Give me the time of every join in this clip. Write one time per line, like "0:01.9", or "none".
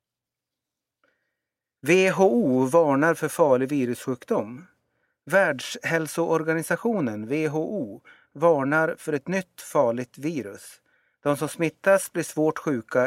none

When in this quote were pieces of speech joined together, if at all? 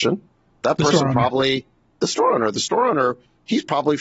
none

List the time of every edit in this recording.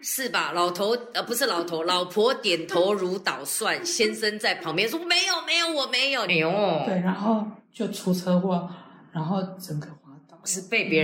0:06.3
0:07.6

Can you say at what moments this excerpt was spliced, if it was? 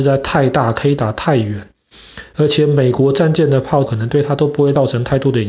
0:03.9

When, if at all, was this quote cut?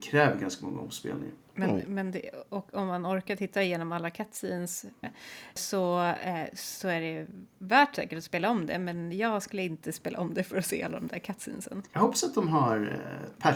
0:05.0

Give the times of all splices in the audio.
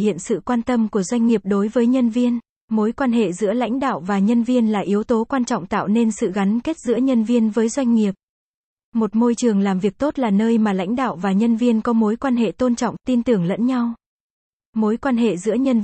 0:02.6

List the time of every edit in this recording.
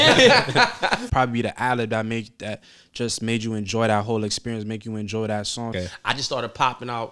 0:01.1
0:05.7

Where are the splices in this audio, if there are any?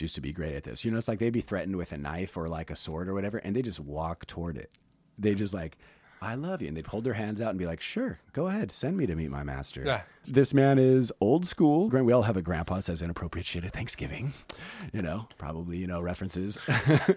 0:10.2
0:11.9

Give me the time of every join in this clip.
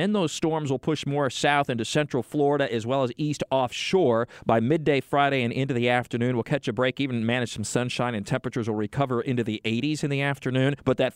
none

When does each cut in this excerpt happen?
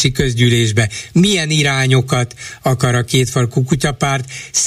0:01.1

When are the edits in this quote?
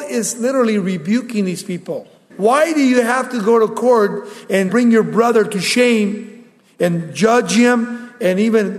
0:02.3
0:04.7

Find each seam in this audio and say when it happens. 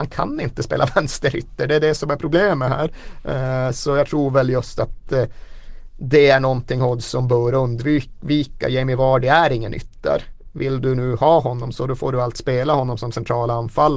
none

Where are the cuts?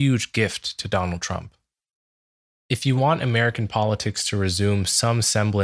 0:02.6

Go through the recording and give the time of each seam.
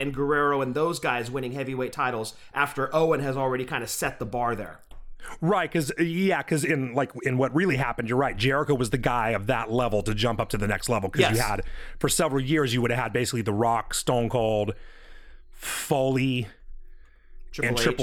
none

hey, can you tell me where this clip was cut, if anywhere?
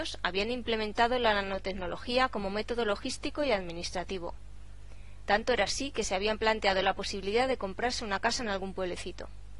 0:05.3

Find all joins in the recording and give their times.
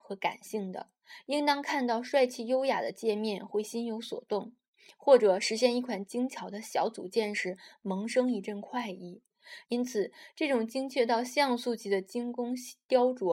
0:09.6

